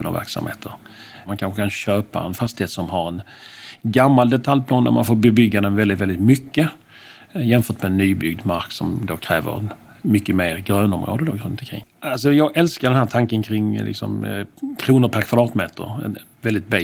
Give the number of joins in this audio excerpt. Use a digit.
1